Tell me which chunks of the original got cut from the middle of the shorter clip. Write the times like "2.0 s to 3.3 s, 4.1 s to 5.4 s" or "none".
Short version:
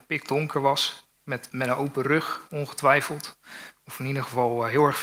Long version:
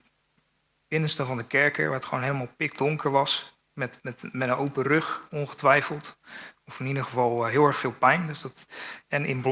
4.0 s to 4.3 s